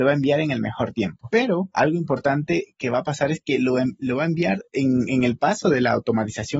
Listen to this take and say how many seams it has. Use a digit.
0